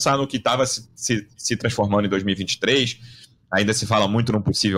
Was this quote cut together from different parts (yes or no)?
no